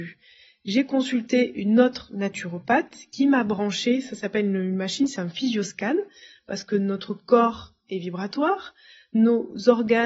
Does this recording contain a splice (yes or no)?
no